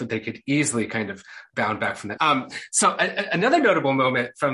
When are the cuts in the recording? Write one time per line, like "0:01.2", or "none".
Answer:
0:02.2